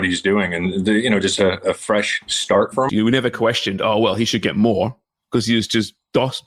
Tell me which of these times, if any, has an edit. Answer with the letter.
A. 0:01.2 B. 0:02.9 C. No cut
B